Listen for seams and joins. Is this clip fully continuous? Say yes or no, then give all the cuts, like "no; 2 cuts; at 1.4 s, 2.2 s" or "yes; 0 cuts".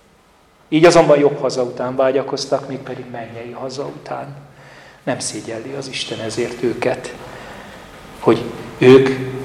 yes; 0 cuts